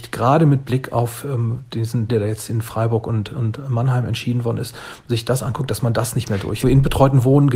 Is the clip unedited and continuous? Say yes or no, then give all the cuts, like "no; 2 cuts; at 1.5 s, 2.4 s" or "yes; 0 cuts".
no; 2 cuts; at 2.1 s, 6.6 s